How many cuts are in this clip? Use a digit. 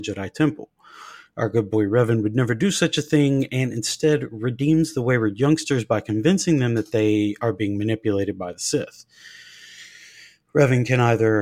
0